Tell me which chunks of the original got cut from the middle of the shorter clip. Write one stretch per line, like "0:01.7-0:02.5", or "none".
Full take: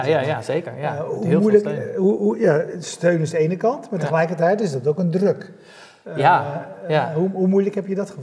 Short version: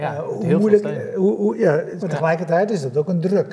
0:02.8-0:03.9